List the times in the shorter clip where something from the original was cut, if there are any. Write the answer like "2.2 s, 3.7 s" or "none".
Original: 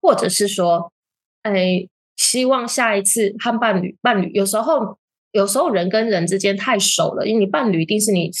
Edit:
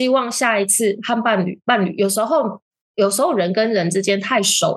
none